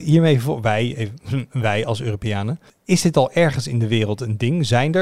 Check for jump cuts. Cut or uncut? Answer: cut